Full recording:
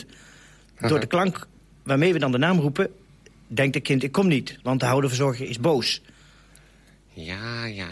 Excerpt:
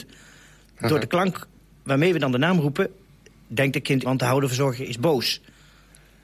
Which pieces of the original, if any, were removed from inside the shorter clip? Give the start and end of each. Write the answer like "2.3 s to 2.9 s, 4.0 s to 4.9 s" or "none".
4.0 s to 4.6 s